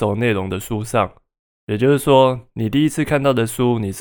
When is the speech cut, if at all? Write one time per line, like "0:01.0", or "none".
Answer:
none